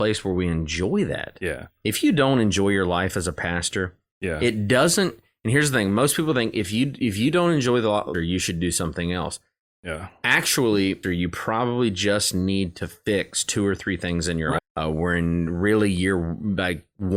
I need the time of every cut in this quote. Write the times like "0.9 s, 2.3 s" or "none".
8.1 s, 11.0 s, 14.6 s